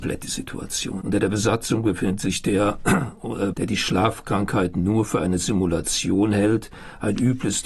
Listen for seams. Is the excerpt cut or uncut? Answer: cut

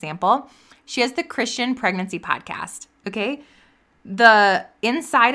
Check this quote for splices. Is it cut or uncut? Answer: uncut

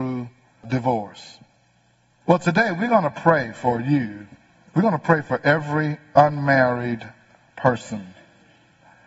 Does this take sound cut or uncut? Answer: cut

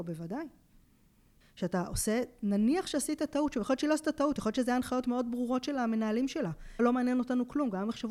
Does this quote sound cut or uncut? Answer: cut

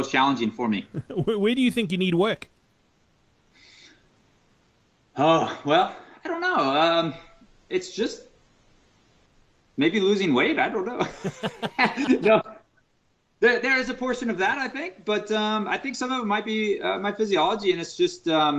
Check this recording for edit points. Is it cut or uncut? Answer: uncut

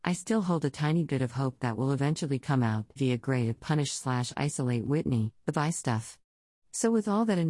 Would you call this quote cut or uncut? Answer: cut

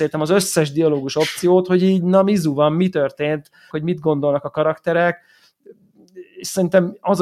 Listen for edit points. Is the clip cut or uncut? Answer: cut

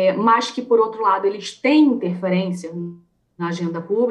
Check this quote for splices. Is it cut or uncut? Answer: uncut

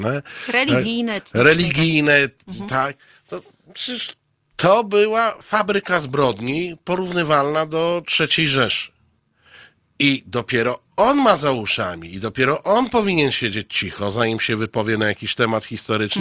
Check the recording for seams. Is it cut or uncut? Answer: uncut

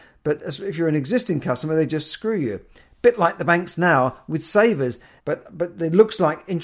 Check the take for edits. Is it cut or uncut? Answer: cut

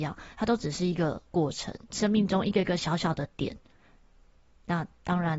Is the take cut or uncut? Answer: cut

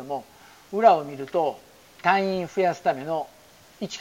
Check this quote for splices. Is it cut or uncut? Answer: cut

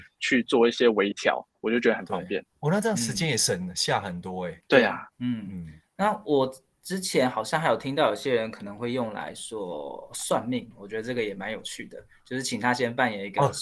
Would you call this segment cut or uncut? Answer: cut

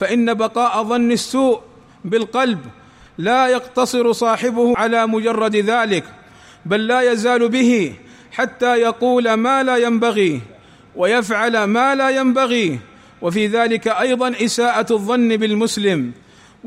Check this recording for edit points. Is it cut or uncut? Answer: uncut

